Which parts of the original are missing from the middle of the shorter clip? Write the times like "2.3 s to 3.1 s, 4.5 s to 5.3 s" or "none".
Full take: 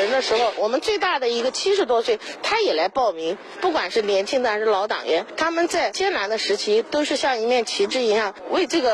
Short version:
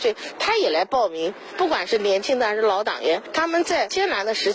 none